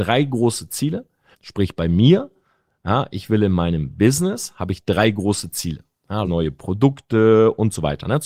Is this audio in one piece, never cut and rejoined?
no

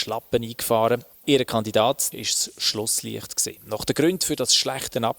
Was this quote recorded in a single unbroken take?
no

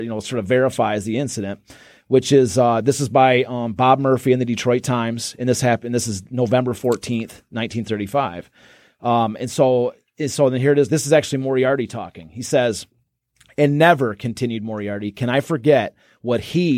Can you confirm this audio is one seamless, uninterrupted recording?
yes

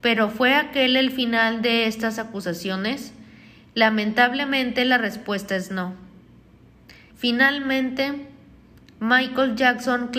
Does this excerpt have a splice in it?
yes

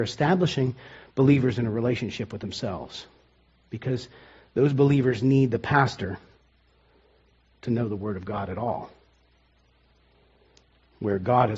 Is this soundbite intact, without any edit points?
yes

